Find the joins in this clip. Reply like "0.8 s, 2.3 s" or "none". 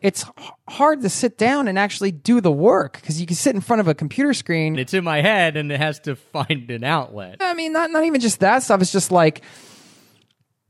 4.7 s, 7.4 s